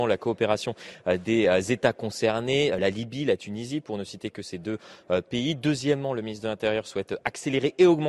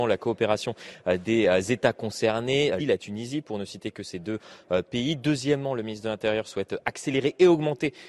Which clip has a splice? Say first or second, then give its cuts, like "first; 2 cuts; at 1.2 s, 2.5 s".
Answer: second; 1 cut; at 2.8 s